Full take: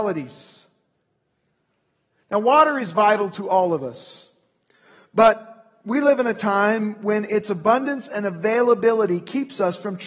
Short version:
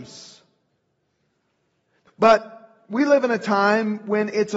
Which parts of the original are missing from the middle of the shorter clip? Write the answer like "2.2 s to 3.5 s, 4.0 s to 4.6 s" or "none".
2.3 s to 5.0 s